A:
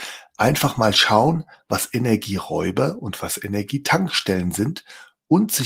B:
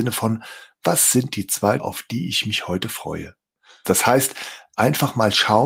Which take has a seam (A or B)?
B